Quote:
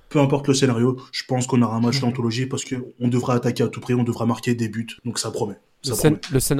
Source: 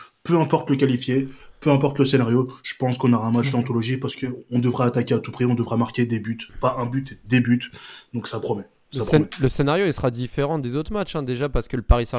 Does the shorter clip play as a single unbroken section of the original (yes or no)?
no